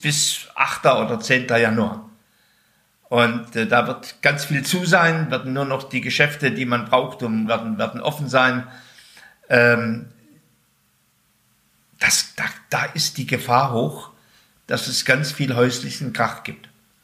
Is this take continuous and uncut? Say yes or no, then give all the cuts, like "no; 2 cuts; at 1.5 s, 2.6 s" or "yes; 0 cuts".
no; 1 cut; at 7.5 s